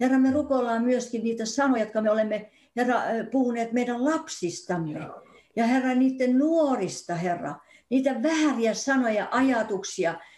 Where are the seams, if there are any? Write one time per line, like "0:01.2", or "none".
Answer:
none